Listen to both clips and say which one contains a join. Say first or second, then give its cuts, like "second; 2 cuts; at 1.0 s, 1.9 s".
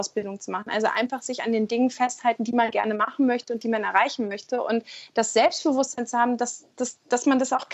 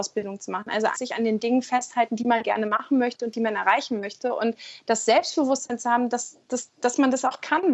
second; 1 cut; at 0.9 s